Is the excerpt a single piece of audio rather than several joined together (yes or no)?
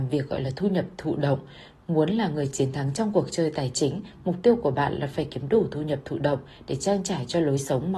yes